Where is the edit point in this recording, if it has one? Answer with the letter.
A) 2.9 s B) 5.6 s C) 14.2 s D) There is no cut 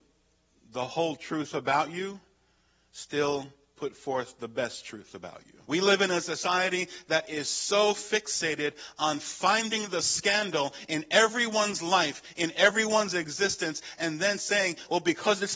B